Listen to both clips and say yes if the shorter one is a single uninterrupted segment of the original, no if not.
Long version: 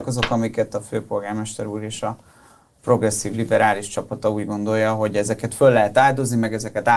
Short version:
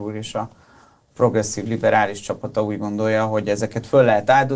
yes